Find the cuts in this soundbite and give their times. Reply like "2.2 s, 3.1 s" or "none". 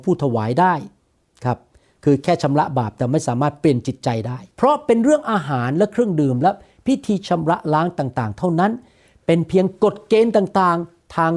4.5 s